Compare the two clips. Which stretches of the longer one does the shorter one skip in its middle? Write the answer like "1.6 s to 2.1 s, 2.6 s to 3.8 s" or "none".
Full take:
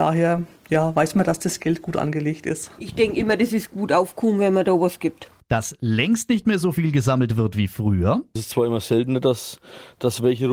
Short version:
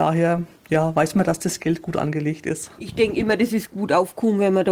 none